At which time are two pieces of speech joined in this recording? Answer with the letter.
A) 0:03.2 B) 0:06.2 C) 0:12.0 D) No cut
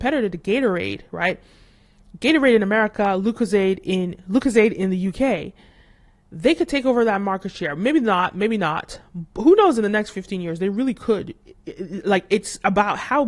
D